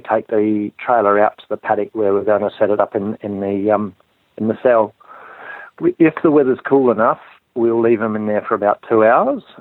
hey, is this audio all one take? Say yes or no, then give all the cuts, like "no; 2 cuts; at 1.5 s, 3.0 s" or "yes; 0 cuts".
yes; 0 cuts